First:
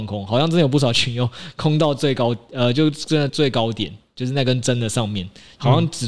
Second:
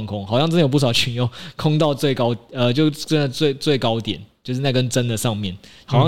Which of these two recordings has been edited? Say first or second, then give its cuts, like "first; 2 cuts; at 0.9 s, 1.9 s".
first; 1 cut; at 3.3 s